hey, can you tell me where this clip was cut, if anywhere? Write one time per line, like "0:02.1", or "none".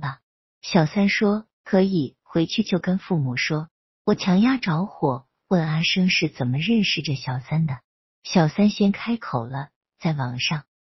none